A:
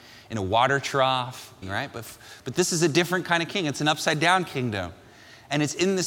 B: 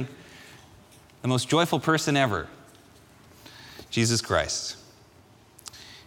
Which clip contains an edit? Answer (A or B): A